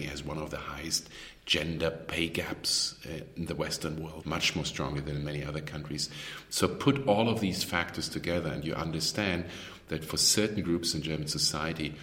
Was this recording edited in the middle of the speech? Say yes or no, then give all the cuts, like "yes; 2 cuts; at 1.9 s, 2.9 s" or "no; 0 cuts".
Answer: yes; 1 cut; at 4.2 s